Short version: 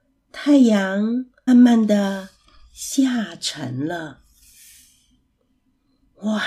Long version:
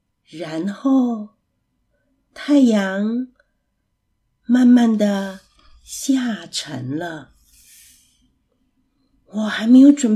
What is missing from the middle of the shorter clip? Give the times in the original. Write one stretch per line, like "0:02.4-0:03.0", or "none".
0:03.5-0:04.6